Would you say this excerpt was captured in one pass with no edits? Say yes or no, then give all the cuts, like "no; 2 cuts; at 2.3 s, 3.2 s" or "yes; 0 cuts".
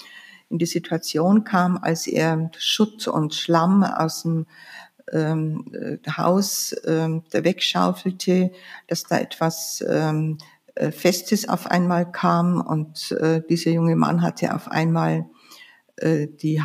yes; 0 cuts